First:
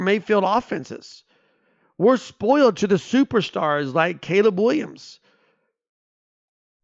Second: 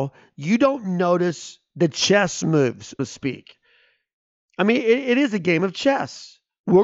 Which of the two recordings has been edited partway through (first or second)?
second